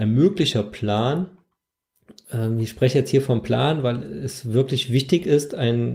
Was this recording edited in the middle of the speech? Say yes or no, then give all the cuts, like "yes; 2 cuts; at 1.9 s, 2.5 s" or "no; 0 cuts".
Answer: no; 0 cuts